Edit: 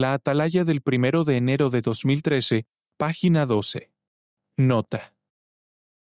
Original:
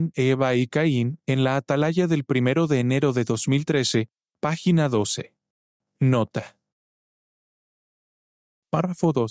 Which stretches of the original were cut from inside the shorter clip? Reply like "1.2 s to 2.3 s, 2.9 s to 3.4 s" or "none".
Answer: none